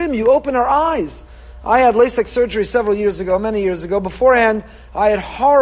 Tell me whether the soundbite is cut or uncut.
uncut